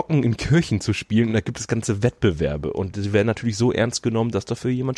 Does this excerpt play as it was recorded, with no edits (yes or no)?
yes